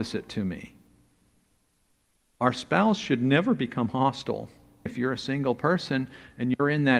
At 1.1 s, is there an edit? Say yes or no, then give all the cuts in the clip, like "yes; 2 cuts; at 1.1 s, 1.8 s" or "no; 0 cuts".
no; 1 cut; at 4.9 s